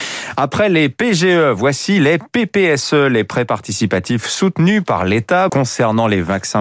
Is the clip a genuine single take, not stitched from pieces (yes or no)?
no